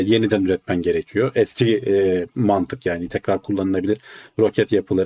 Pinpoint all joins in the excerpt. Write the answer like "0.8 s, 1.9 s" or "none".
none